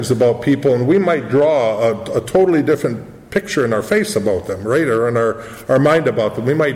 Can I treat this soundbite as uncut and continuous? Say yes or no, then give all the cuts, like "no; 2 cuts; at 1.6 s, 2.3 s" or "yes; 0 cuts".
yes; 0 cuts